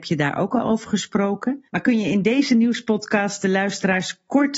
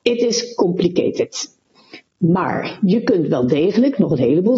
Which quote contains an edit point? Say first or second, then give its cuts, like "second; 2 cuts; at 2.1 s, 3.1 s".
first; 1 cut; at 1.7 s